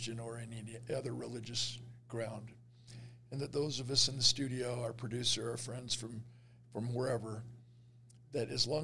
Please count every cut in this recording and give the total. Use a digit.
0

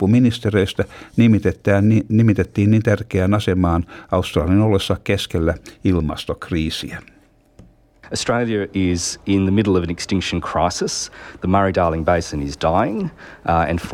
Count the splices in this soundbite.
0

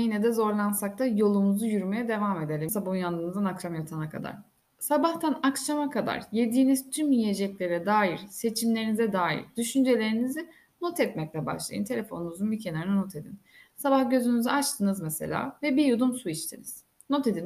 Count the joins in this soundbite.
1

